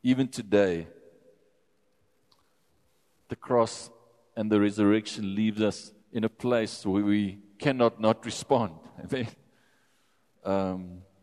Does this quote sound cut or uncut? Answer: cut